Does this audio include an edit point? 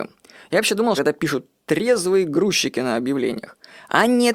yes; 1 cut; at 1.0 s

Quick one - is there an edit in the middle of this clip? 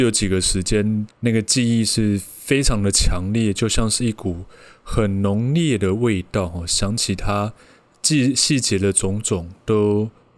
yes; 1 cut; at 1.1 s

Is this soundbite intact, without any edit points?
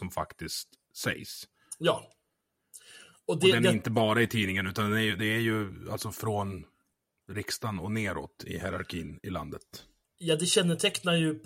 yes; 0 cuts

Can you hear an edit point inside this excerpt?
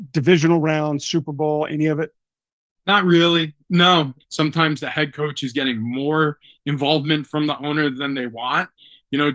yes; 1 cut; at 4.2 s

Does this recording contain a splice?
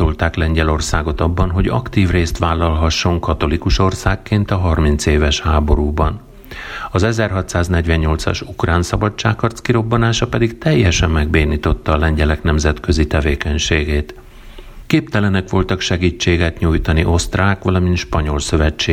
no; 0 cuts

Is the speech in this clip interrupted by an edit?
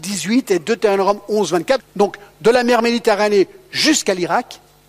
yes; 1 cut; at 1.8 s

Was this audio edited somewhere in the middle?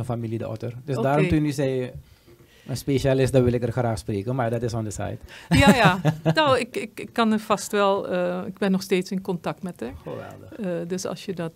no; 0 cuts

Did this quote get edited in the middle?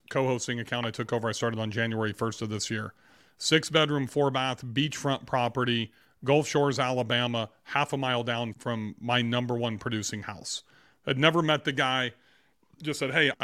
no; 0 cuts

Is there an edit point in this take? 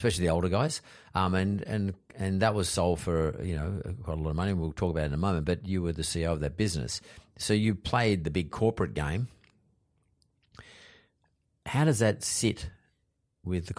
no; 0 cuts

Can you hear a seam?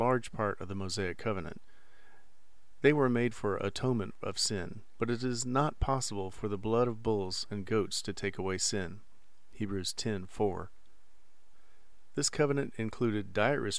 yes; 1 cut; at 5.0 s

